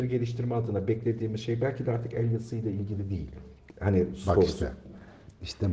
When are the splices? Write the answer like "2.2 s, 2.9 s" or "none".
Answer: 3.7 s